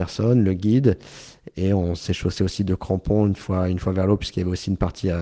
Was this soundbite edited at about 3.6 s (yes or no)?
no